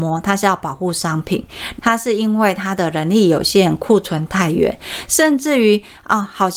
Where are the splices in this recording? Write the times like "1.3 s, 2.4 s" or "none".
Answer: 1.8 s